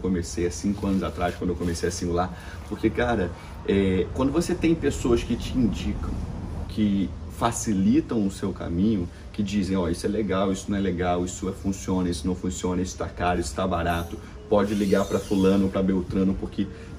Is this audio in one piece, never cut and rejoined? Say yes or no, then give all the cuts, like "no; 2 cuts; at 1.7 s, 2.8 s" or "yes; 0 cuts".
no; 1 cut; at 6.7 s